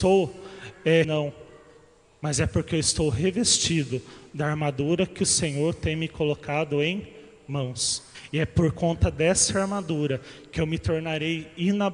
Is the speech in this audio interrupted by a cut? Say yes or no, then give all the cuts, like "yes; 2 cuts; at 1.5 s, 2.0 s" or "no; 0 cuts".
yes; 1 cut; at 1.0 s